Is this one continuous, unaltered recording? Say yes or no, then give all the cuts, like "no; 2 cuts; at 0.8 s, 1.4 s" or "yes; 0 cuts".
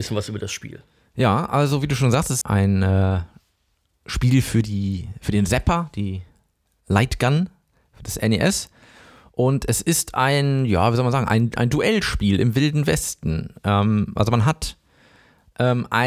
no; 1 cut; at 2.4 s